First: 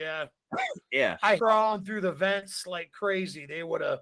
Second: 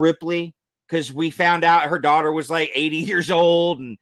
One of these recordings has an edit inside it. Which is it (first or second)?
first